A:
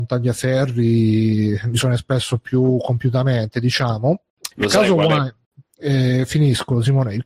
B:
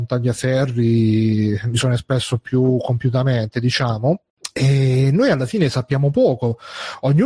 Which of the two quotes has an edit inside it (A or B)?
A